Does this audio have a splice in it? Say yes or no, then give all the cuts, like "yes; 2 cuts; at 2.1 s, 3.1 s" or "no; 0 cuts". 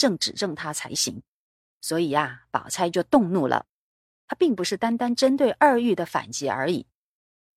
no; 0 cuts